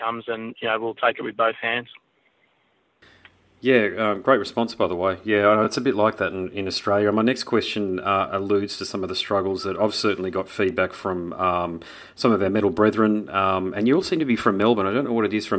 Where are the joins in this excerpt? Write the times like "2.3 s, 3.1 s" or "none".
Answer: none

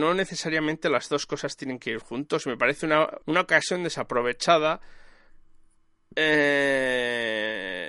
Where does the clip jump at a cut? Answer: 3.2 s

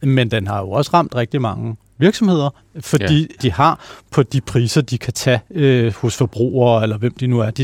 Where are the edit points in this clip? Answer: 3.4 s

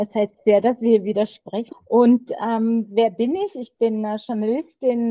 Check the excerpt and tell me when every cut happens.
1.7 s

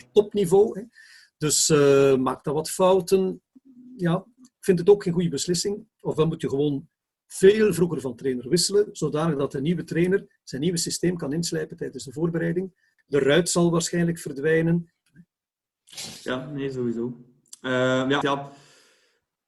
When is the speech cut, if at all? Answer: 13.0 s, 15.1 s, 18.2 s

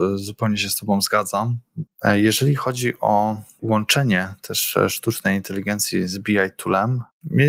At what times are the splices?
1.9 s

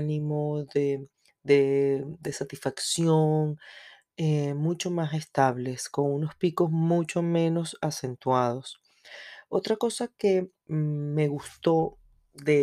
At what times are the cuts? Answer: 10.7 s

